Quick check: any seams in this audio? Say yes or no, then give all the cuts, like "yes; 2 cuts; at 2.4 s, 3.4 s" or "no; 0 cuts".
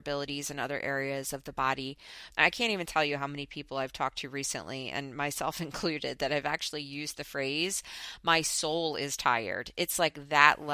yes; 1 cut; at 2.3 s